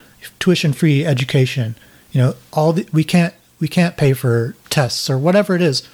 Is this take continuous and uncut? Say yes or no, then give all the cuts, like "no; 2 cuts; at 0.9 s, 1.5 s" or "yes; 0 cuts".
no; 1 cut; at 4.6 s